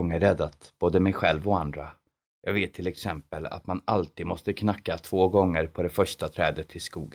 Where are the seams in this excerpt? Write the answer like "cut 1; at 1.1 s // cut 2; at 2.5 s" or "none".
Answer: cut 1; at 2.2 s